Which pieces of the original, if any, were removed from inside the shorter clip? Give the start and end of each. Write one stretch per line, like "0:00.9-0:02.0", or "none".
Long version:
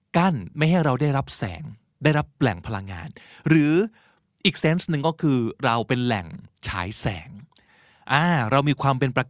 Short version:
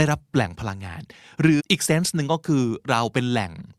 0:03.7-0:04.3